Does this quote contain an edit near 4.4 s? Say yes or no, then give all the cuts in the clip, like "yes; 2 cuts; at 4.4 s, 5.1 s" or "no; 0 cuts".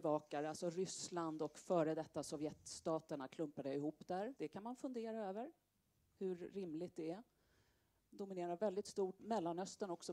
yes; 2 cuts; at 4.4 s, 9.2 s